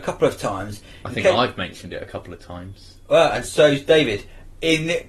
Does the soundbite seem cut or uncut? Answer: uncut